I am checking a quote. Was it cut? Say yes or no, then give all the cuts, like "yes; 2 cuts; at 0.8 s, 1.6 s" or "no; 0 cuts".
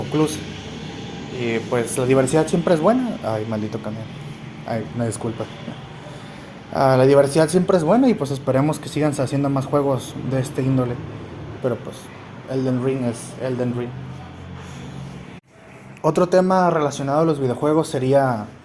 yes; 1 cut; at 11.6 s